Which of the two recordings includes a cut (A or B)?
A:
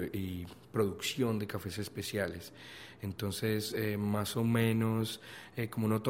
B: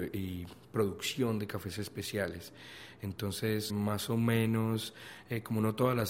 B